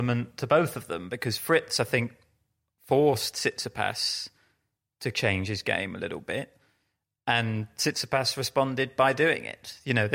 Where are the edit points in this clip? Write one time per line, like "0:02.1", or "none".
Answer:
none

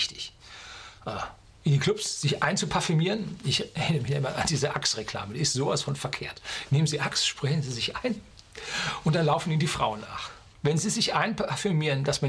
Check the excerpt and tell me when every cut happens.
0:10.5

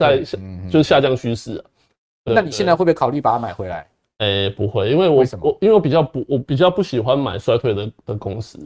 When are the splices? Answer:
0:02.3

